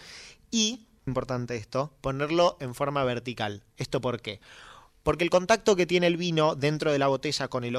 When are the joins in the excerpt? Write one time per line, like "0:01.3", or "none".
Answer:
0:01.1

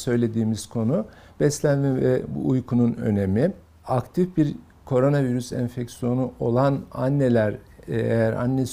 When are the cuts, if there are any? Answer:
0:03.8

